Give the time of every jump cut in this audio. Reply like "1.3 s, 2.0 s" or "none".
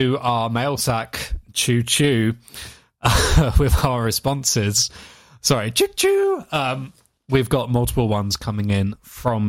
none